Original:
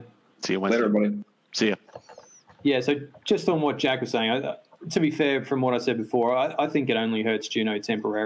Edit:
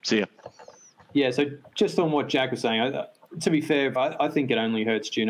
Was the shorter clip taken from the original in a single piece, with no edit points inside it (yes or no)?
no